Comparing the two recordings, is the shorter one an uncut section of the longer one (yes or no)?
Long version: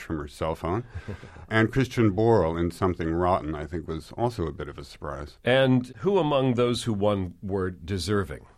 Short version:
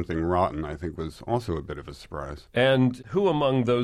yes